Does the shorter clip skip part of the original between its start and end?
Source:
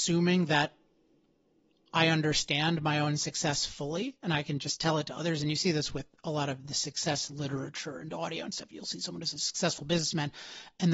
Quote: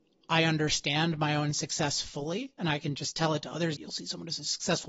yes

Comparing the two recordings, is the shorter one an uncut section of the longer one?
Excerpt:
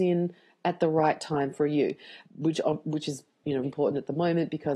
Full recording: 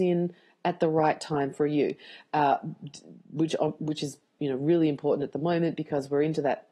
no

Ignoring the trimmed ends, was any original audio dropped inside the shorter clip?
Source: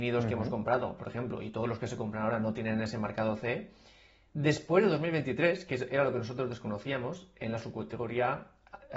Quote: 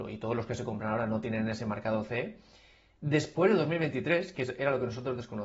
no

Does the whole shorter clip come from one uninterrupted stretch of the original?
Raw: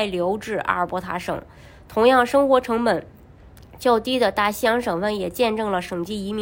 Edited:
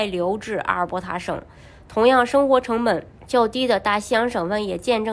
no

